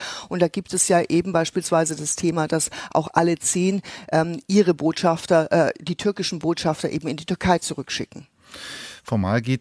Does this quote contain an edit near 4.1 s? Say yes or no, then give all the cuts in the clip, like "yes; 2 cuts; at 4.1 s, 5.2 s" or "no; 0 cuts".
no; 0 cuts